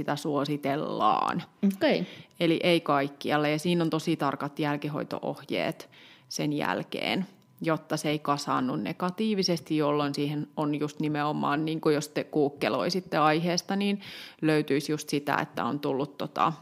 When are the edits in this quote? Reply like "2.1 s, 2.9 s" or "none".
none

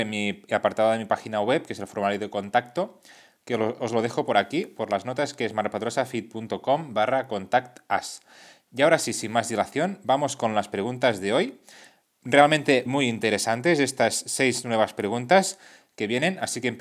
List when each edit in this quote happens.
12.9 s

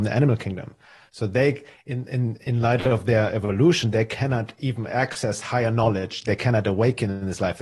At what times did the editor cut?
none

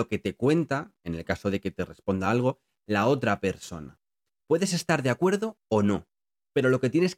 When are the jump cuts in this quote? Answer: 4.4 s

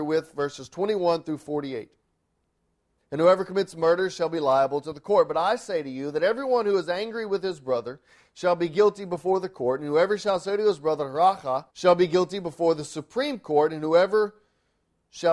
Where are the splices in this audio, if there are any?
3.0 s, 11.7 s

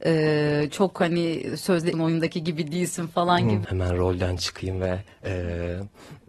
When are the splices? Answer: 1.9 s, 3.6 s

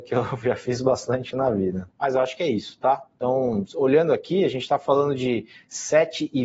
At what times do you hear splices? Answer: 1.9 s

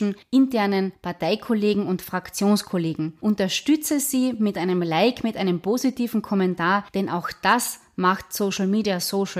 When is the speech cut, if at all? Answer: none

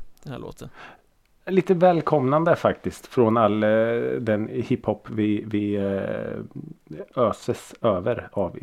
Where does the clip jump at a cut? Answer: none

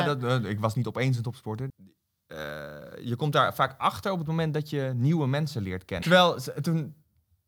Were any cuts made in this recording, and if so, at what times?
1.7 s, 6.0 s

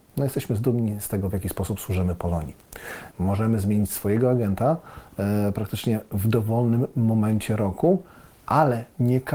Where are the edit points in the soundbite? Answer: 3.1 s

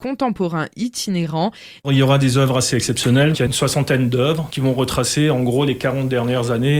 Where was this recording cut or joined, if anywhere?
1.8 s, 3.3 s

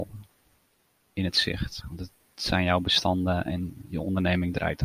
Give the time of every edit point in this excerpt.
1.8 s

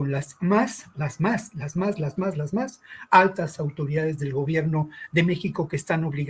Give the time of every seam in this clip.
none

